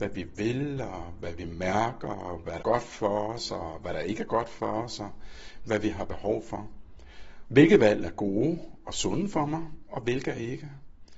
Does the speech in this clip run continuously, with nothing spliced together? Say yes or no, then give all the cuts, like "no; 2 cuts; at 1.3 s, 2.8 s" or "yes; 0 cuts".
no; 2 cuts; at 2.6 s, 7.4 s